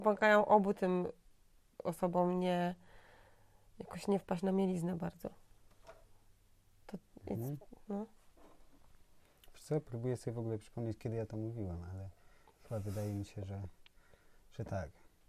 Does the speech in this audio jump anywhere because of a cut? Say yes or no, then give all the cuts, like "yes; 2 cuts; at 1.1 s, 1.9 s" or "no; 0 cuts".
no; 0 cuts